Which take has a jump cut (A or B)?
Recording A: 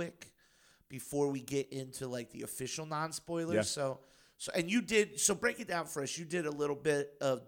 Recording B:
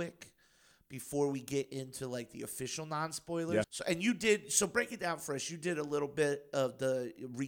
B